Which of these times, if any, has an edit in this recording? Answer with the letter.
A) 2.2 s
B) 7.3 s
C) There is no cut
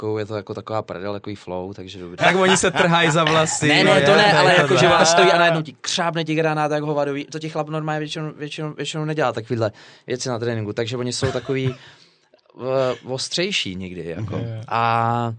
A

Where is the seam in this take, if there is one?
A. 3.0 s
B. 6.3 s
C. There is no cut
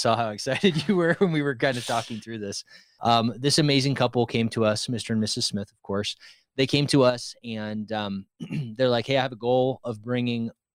A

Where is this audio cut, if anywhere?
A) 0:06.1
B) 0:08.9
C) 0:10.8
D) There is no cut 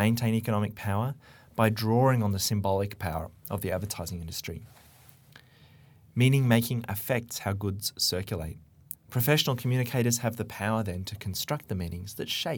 B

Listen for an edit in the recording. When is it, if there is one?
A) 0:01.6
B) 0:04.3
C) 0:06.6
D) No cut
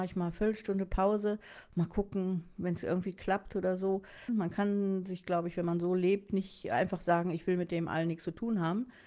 B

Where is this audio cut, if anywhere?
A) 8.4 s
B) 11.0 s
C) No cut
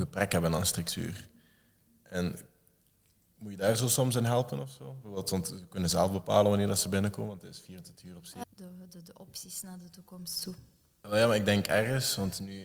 A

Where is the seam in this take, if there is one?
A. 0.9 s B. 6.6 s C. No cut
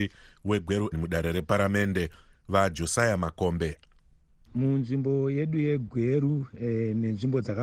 A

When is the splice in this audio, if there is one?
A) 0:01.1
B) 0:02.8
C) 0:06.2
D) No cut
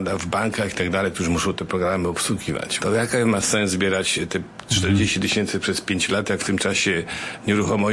B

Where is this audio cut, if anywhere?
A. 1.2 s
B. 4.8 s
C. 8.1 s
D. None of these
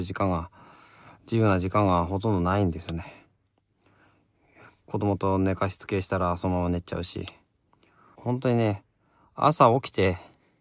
C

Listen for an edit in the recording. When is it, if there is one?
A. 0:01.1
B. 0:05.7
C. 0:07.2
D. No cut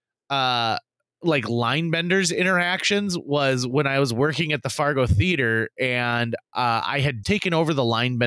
C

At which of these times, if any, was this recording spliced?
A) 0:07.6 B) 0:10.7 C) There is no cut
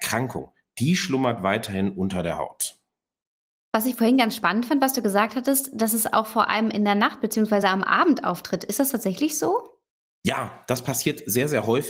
C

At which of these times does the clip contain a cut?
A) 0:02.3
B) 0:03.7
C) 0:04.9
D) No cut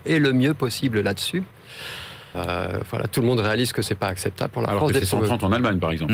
A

